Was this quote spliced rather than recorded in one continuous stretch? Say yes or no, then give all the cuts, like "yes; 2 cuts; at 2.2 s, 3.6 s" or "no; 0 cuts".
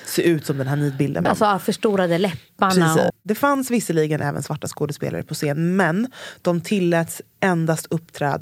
yes; 2 cuts; at 1.3 s, 3.1 s